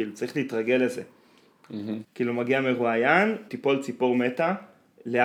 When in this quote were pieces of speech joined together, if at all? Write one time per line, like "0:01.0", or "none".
0:02.0
0:03.5